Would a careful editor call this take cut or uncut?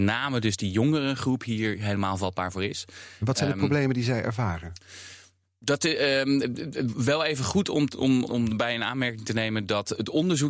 cut